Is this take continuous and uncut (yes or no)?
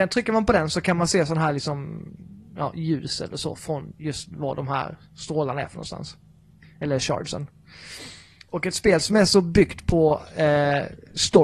yes